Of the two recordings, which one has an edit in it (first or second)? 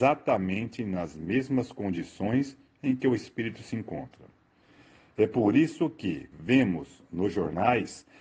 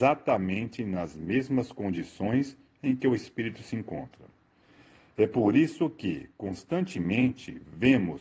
first